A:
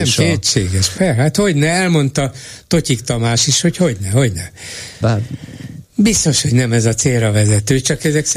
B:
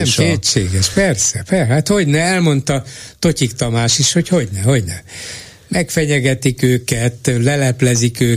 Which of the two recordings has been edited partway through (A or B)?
A